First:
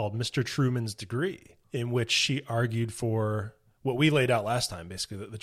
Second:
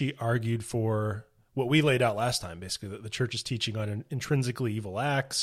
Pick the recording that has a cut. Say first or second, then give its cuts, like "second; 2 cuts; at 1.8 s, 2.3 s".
first; 1 cut; at 1.6 s